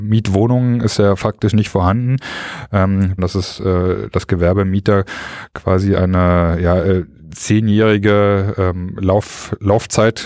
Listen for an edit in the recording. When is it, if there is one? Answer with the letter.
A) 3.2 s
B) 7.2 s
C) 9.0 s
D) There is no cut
A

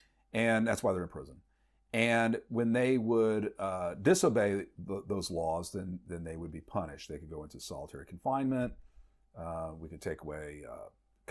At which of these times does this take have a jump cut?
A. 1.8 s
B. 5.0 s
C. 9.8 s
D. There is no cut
D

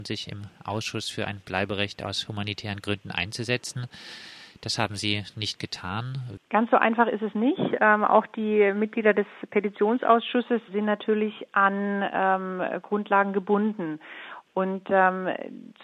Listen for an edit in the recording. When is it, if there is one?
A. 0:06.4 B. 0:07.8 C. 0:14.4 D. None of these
A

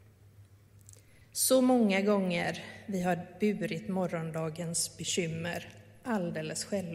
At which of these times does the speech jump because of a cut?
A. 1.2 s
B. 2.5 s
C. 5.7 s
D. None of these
A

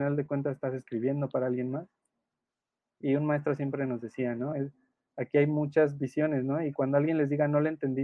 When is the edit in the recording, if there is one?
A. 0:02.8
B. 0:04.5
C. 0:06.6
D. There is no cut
B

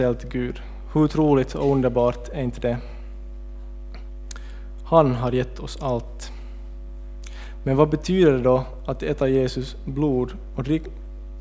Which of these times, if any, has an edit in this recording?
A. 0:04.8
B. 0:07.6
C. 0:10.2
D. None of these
D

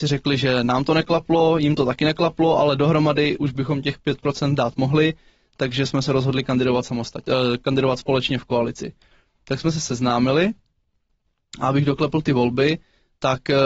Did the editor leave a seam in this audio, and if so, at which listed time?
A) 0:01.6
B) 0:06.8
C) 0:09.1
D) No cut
D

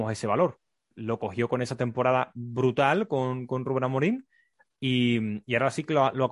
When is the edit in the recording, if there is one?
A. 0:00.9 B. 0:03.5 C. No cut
C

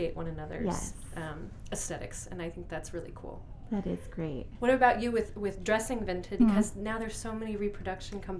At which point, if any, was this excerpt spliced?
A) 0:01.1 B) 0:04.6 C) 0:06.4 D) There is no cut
C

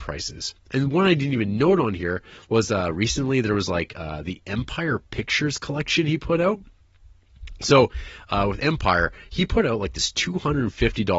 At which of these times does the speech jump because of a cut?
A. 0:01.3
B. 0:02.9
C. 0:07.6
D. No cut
D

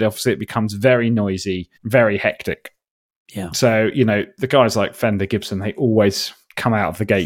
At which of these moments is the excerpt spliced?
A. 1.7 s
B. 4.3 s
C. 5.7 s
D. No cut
A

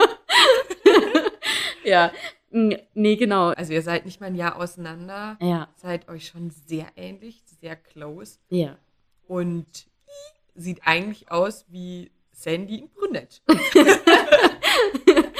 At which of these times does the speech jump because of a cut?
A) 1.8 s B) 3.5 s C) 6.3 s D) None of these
B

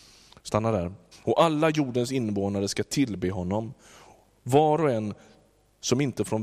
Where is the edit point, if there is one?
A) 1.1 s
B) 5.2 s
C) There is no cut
A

